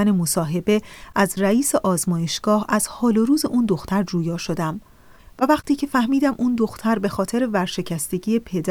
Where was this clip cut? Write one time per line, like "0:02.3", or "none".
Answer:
none